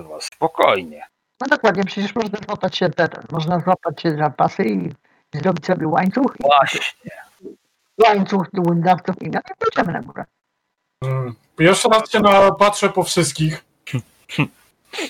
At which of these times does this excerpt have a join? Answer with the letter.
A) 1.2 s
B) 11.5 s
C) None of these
C